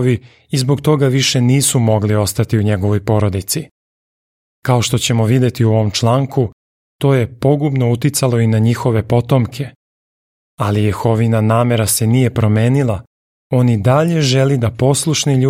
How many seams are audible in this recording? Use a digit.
0